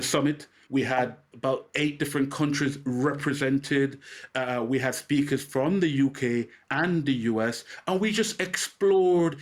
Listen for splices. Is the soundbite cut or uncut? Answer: uncut